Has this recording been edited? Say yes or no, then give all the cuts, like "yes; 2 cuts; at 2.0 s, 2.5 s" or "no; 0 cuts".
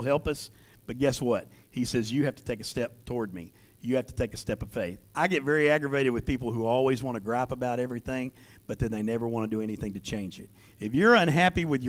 yes; 1 cut; at 5.1 s